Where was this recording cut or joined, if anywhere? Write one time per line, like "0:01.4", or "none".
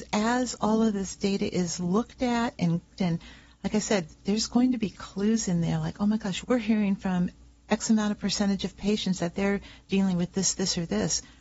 0:03.0
0:06.4